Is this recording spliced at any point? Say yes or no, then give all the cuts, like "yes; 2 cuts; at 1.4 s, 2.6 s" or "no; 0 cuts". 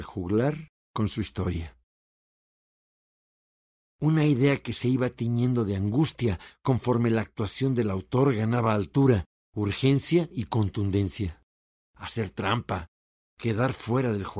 yes; 2 cuts; at 3.8 s, 11.9 s